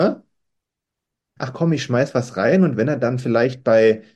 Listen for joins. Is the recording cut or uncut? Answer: cut